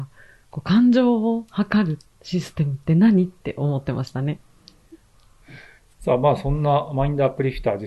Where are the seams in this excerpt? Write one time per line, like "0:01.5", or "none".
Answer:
0:05.9